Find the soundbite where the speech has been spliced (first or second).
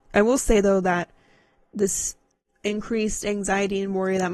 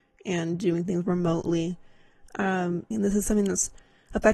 second